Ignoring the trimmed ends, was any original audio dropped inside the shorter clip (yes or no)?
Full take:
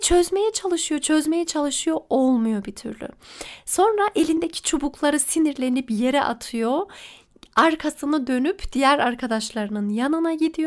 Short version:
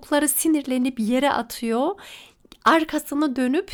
no